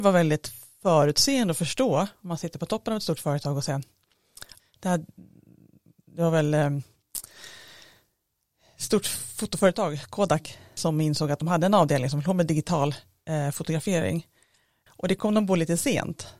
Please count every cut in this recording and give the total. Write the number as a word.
three